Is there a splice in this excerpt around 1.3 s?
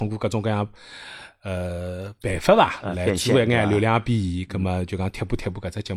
no; 0 cuts

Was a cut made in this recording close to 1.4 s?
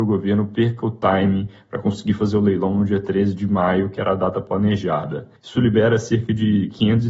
no; 1 cut; at 5.4 s

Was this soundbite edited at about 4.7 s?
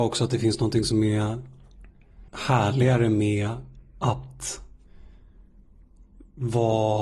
no; 1 cut; at 2.3 s

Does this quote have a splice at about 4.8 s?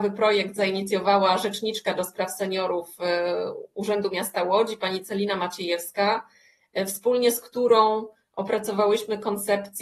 no; 0 cuts

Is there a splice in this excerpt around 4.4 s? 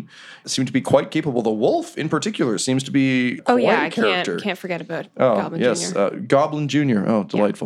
no; 0 cuts

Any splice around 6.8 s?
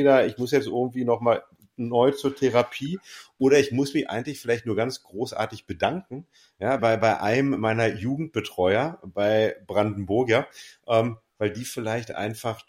yes; 1 cut; at 6.8 s

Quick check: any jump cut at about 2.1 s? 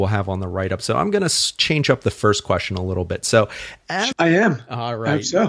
no; 1 cut; at 4.1 s

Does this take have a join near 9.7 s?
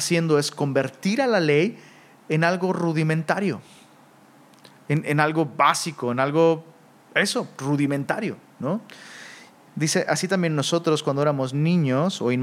yes; 1 cut; at 9.7 s

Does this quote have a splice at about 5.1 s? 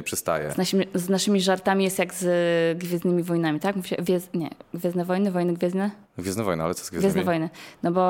no; 0 cuts

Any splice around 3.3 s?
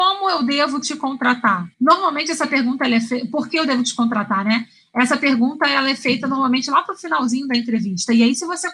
no; 1 cut; at 1.7 s

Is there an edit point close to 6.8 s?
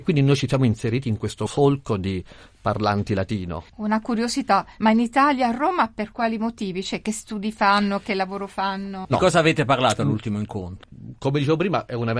no; 2 cuts; at 4.8 s, 9.1 s

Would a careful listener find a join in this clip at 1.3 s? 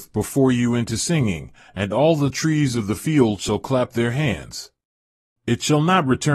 no; 1 cut; at 5.3 s

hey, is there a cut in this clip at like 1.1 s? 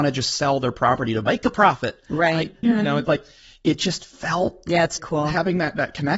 no; 2 cuts; at 2.6 s, 5.0 s

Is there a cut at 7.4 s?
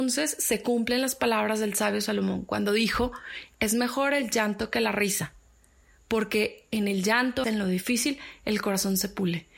yes; 1 cut; at 7.4 s

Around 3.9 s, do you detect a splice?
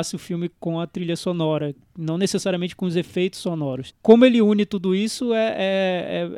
yes; 1 cut; at 3.9 s

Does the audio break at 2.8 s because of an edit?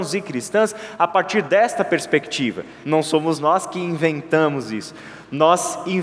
yes; 1 cut; at 2.8 s

